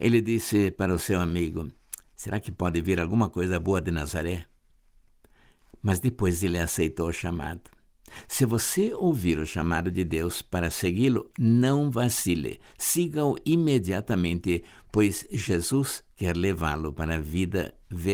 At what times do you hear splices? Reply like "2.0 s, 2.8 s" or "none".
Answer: none